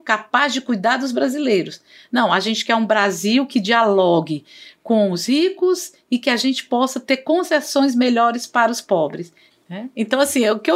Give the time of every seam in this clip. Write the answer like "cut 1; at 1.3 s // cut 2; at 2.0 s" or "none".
cut 1; at 9.5 s